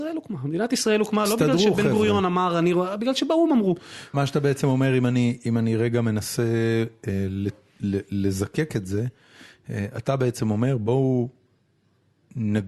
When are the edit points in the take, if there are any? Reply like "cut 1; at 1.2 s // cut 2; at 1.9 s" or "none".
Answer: cut 1; at 4.1 s